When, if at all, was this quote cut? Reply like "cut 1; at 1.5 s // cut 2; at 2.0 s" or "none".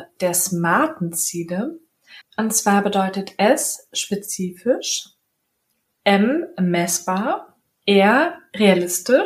cut 1; at 2.2 s // cut 2; at 7.7 s